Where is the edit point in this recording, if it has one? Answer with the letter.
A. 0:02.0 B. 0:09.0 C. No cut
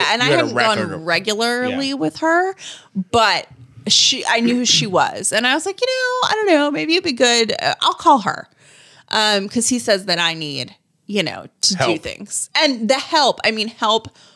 C